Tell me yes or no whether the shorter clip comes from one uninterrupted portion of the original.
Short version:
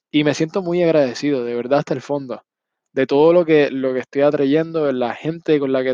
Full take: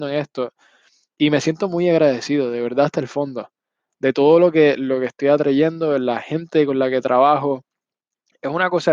yes